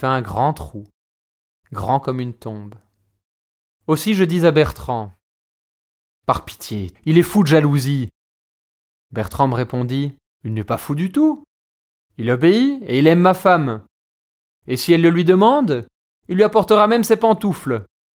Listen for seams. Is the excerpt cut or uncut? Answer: cut